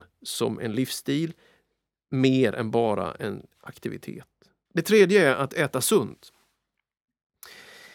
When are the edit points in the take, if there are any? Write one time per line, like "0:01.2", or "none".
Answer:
0:04.7